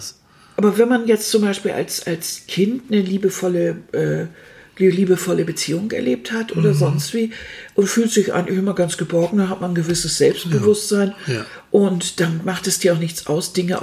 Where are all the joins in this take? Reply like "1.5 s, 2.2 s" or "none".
none